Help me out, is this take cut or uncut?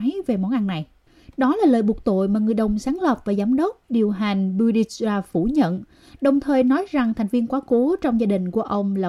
uncut